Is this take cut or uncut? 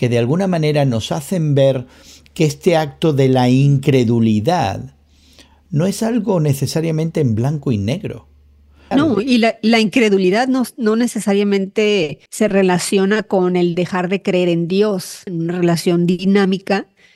cut